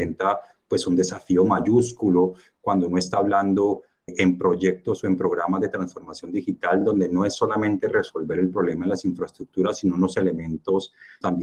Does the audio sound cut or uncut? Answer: uncut